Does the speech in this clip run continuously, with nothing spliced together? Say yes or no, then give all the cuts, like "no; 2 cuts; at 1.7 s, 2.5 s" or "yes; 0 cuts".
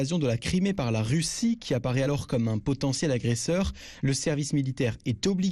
yes; 0 cuts